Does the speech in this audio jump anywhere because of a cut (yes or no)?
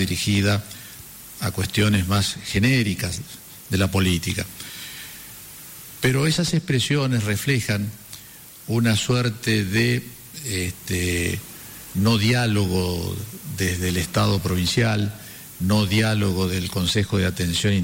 no